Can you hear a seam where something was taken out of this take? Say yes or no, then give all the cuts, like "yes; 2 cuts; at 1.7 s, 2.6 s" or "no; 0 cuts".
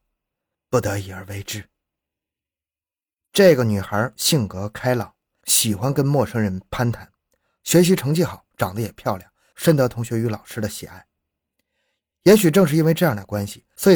no; 0 cuts